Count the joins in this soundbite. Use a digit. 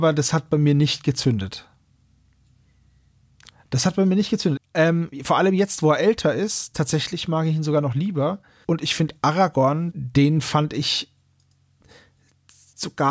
3